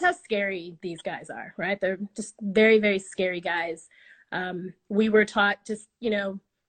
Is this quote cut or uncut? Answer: uncut